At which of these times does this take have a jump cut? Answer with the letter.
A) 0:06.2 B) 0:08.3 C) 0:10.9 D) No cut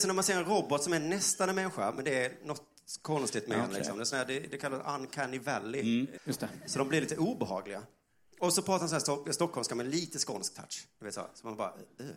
A